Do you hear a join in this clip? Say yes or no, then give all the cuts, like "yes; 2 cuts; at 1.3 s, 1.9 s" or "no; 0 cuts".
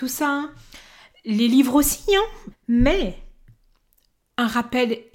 yes; 1 cut; at 2.5 s